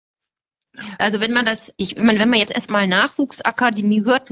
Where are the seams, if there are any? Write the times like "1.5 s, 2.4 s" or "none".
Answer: 1.0 s